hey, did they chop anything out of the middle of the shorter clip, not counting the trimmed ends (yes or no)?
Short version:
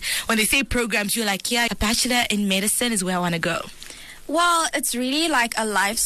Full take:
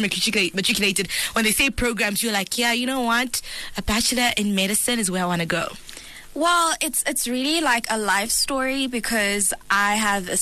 yes